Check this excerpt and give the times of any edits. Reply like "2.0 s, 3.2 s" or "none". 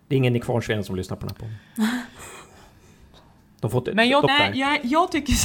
4.3 s

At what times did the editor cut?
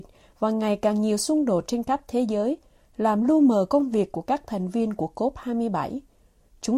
none

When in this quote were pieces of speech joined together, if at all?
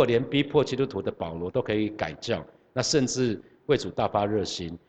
none

